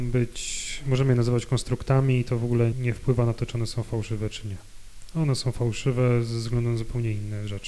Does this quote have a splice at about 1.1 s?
no; 1 cut; at 2.7 s

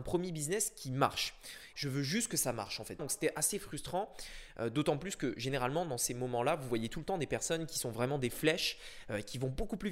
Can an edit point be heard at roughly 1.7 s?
yes; 2 cuts; at 1.7 s, 3.0 s

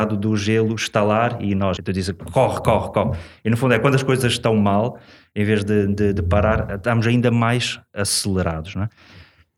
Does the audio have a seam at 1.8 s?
yes; 1 cut; at 1.8 s

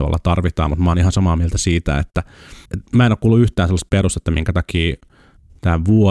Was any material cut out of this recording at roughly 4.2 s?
no; 1 cut; at 2.7 s

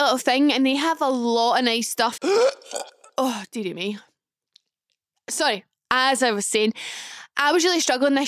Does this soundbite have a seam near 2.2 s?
yes; 1 cut; at 2.2 s

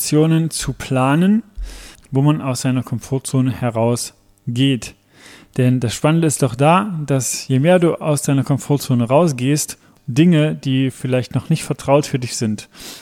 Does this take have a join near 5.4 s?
no; 1 cut; at 1.9 s

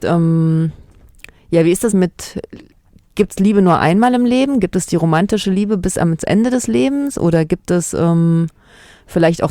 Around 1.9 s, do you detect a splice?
yes; 1 cut; at 1.9 s

